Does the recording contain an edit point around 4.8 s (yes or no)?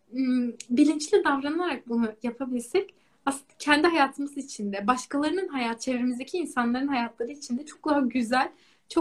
no